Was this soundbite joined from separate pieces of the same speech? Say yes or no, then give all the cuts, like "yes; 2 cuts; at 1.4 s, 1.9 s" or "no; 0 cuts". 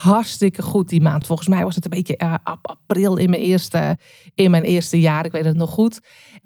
no; 0 cuts